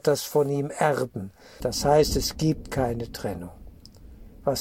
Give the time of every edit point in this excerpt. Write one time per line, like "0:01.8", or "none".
0:01.6